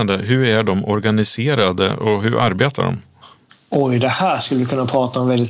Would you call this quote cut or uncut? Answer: uncut